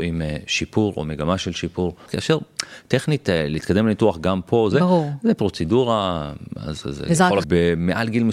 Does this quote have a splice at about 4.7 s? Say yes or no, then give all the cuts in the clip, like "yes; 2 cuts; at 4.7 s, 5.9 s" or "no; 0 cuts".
yes; 3 cuts; at 2.1 s, 4.7 s, 7.4 s